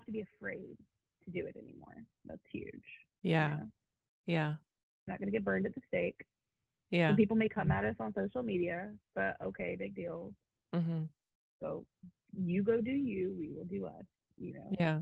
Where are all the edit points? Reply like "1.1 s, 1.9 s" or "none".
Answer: none